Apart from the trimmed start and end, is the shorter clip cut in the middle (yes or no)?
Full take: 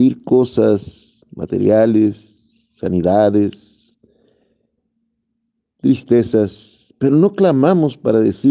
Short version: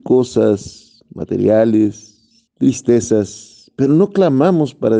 yes